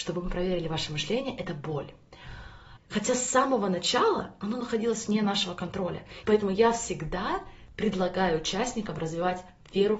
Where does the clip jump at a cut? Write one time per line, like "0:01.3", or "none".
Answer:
0:02.8
0:06.2